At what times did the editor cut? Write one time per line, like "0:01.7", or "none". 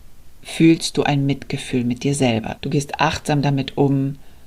0:02.6